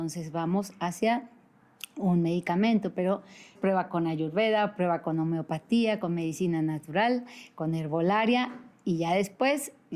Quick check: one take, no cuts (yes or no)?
no